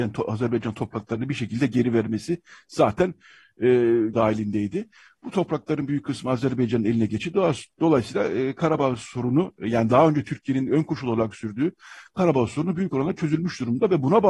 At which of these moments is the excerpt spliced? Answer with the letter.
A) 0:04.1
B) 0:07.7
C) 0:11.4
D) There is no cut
A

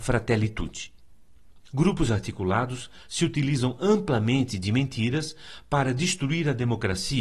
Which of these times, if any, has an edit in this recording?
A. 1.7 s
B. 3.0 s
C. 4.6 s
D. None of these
A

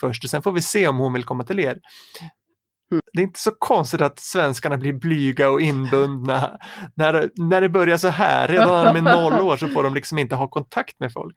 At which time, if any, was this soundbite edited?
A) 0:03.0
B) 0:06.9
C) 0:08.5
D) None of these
A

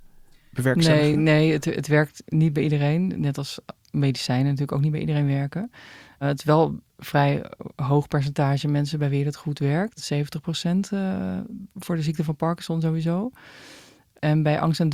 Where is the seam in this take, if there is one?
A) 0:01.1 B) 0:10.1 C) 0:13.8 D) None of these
D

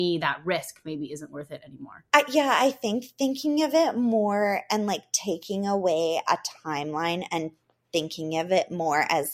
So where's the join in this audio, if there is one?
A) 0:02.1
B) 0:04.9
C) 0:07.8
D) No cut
A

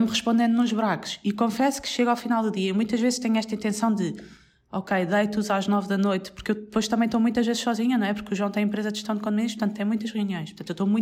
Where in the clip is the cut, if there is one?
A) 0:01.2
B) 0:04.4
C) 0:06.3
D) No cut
D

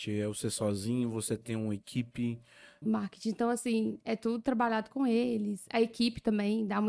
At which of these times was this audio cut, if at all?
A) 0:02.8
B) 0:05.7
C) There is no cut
A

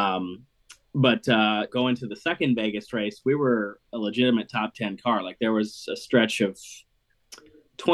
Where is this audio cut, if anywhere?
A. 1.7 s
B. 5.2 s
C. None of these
A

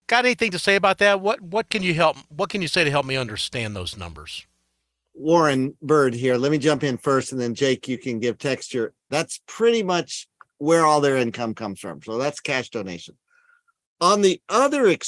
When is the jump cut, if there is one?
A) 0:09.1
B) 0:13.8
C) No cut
A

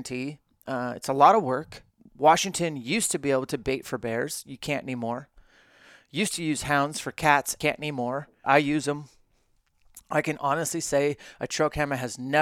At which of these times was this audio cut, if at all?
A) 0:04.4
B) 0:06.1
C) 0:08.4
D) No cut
C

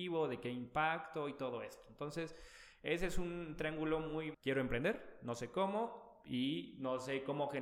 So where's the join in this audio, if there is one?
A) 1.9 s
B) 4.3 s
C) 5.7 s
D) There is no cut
B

